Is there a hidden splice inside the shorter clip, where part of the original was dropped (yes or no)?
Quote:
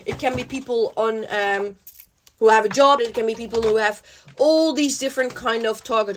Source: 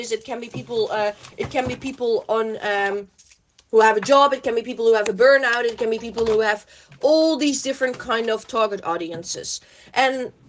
yes